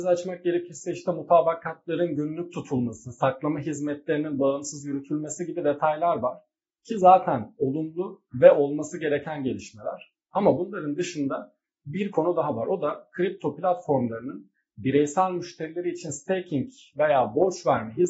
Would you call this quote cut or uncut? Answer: uncut